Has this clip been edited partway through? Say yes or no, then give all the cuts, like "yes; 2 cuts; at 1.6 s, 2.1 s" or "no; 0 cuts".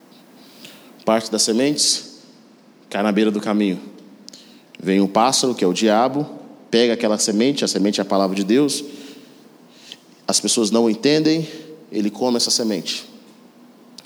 no; 0 cuts